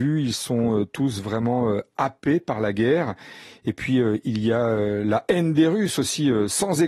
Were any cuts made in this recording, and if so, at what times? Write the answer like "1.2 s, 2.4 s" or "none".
none